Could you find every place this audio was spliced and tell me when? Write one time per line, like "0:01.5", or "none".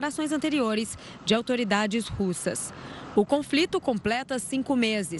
none

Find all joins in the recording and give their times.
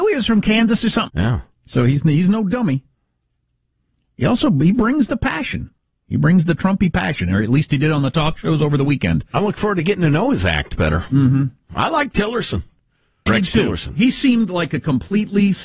0:01.1
0:13.3

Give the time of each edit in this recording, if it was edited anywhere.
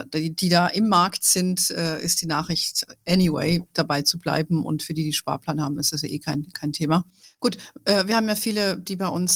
0:07.2

